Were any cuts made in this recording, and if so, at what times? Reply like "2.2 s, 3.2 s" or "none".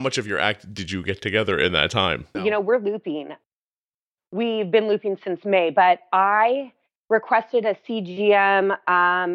2.3 s